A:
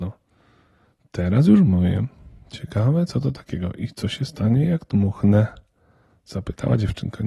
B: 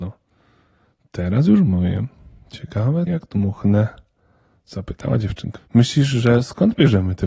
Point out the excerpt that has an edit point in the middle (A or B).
B